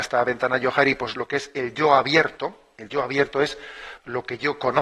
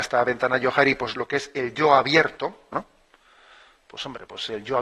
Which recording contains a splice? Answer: second; 1 cut; at 2.7 s

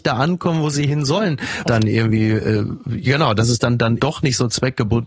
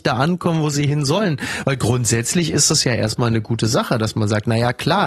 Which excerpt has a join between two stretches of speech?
first; 2 cuts; at 1.7 s, 4.0 s

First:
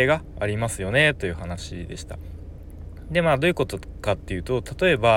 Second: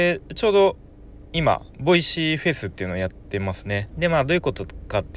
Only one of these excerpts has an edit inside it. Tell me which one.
second; 1 cut; at 3.9 s

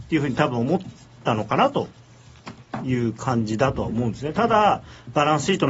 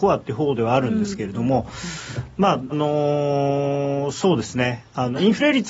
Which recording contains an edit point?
second; 1 cut; at 2.7 s

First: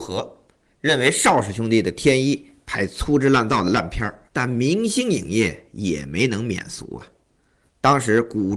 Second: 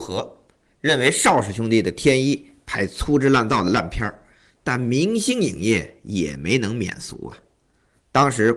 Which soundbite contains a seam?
first; 1 cut; at 4.3 s

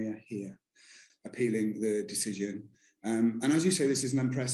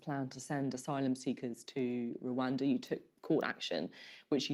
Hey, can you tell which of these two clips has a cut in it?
first; 1 cut; at 1.1 s

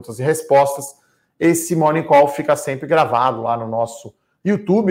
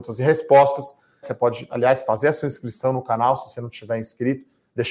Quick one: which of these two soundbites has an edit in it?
second; 1 cut; at 1.2 s

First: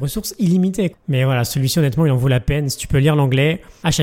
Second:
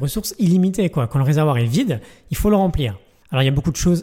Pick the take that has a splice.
first; 1 cut; at 0.9 s

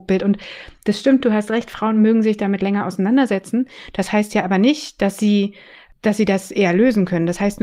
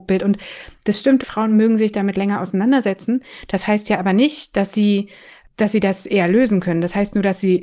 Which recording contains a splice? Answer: second; 1 cut; at 1.2 s

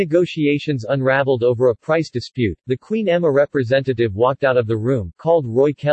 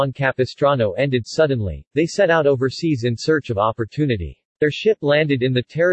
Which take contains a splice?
second; 1 cut; at 4.5 s

